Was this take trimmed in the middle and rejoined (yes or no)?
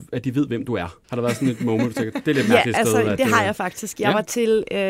yes